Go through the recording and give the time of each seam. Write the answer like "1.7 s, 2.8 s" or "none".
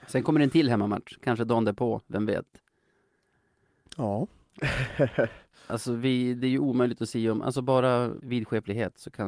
8.2 s